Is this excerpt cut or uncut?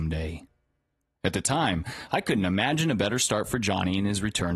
uncut